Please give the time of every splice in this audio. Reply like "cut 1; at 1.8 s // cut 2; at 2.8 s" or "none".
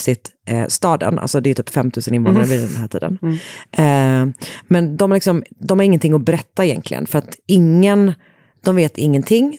none